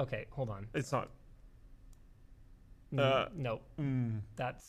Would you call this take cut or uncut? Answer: uncut